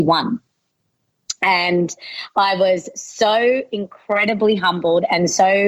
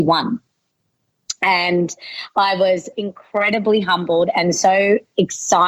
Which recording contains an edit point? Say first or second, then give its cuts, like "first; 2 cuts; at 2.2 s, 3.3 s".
second; 1 cut; at 2.9 s